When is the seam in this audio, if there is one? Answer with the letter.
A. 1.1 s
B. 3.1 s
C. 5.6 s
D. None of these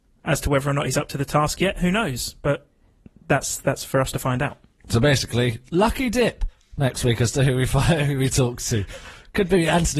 D